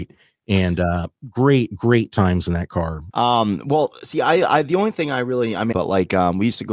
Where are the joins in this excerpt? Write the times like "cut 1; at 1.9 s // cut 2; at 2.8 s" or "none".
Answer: cut 1; at 3.1 s // cut 2; at 5.7 s